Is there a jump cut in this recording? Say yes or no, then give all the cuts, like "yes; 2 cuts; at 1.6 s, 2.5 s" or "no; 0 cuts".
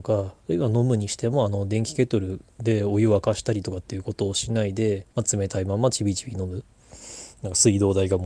yes; 1 cut; at 5.1 s